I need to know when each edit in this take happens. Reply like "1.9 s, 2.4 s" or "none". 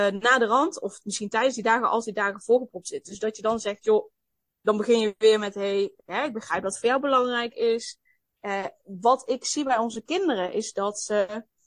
none